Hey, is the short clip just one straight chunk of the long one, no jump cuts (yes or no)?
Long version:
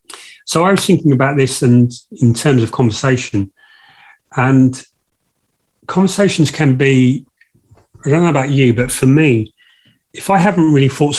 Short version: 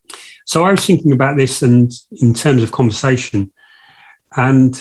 yes